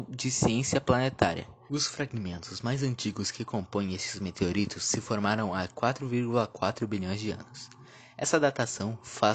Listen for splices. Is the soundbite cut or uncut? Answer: cut